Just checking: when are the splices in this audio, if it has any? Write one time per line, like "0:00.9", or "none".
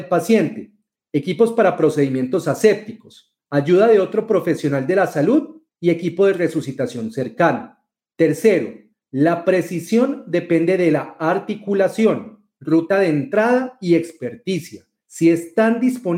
none